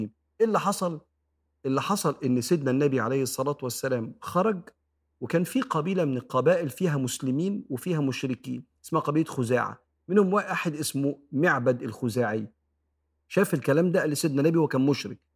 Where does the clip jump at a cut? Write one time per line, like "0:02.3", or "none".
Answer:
none